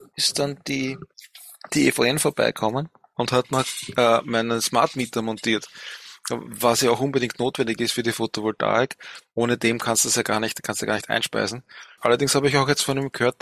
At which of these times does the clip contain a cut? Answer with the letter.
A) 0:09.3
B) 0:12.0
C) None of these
B